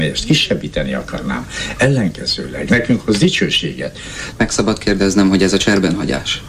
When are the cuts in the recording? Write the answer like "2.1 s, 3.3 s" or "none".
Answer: 4.3 s

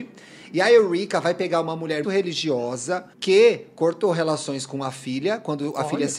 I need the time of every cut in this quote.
2.0 s, 3.1 s

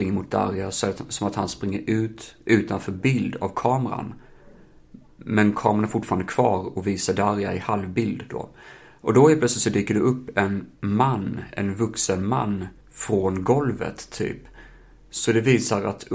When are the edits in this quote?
10.8 s, 12.8 s

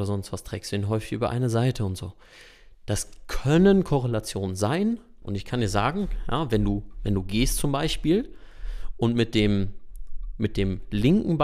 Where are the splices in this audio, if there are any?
5.2 s

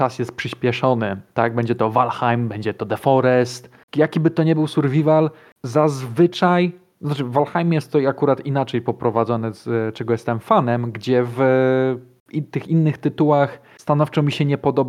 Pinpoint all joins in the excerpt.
3.8 s

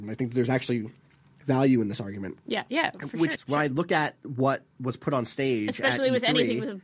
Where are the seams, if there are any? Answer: 3.4 s

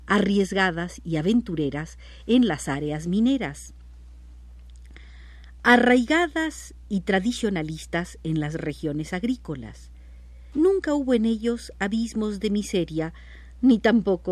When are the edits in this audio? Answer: 10.5 s

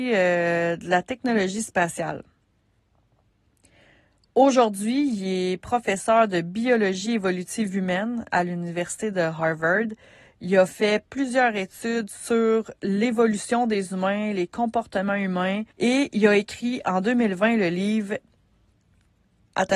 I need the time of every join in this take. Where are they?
15.7 s

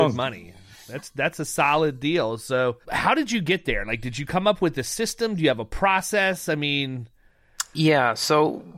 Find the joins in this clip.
2.8 s

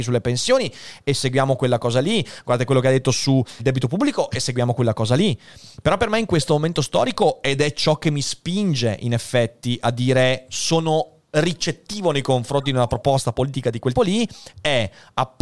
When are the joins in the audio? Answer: 3.6 s, 14.0 s

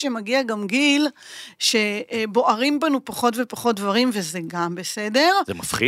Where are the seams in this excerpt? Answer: none

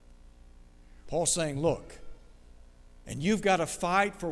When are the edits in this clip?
1.0 s, 3.0 s

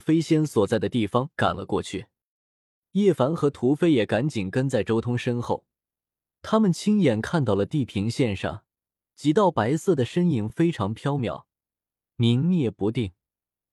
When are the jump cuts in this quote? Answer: none

